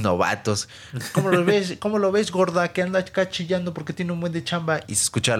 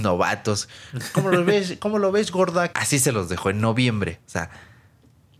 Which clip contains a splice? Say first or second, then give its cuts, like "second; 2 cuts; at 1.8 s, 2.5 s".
second; 1 cut; at 2.7 s